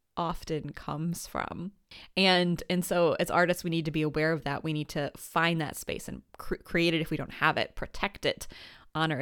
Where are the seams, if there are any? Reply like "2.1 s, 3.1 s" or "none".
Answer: none

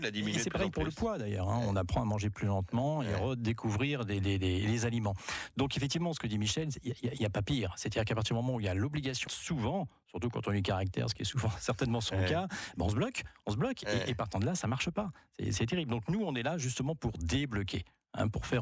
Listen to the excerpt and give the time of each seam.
9.3 s

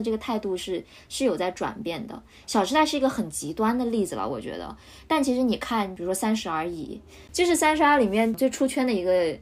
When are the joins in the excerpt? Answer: none

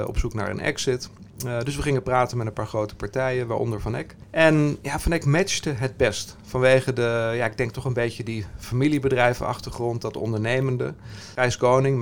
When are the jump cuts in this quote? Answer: none

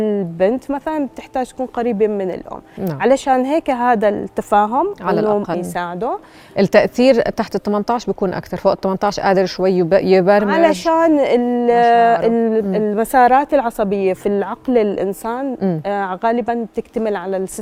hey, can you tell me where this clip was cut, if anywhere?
5.5 s

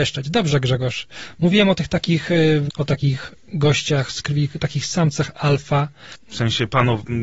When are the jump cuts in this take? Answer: 2.7 s, 6.1 s

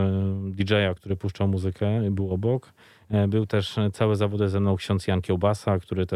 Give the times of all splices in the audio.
1.0 s

